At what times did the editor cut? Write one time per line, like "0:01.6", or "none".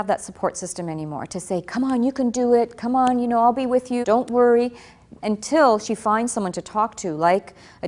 0:04.0
0:05.2